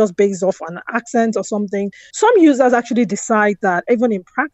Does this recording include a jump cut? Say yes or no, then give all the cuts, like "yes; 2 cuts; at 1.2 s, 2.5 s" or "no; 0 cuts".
yes; 1 cut; at 2.1 s